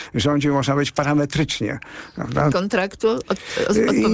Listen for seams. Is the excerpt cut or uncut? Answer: cut